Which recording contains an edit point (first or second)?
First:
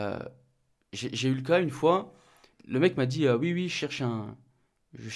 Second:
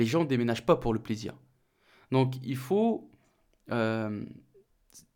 first